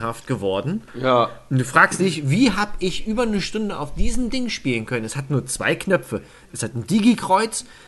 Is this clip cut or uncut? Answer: uncut